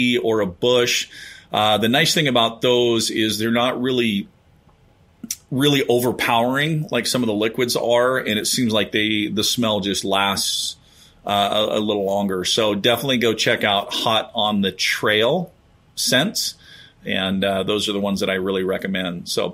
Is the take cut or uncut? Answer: uncut